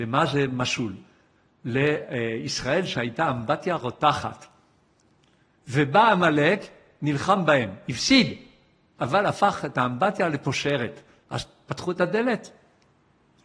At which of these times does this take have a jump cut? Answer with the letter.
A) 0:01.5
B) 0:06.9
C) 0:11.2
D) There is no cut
C